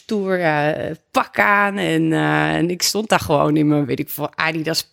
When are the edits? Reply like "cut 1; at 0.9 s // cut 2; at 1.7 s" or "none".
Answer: none

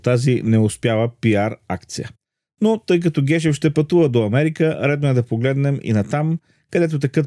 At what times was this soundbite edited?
none

